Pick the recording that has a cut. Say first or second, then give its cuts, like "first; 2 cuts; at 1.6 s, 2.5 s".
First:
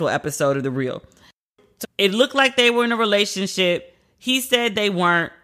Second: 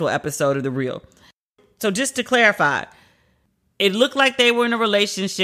first; 1 cut; at 1.8 s